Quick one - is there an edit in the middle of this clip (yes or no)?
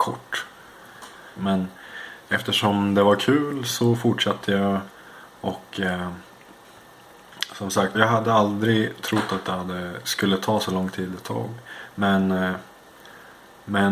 yes